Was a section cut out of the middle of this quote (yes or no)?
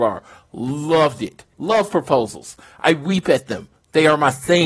yes